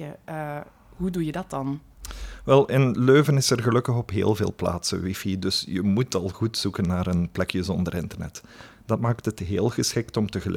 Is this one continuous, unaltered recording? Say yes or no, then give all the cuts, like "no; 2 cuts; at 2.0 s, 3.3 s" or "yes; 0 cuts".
no; 1 cut; at 8.7 s